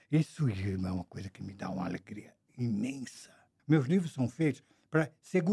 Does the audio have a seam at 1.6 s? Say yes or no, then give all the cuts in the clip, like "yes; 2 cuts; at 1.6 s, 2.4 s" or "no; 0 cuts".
no; 1 cut; at 3.6 s